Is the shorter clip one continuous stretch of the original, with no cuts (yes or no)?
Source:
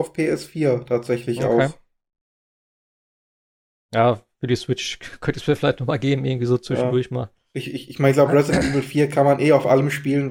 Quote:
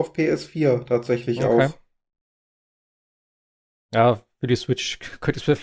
yes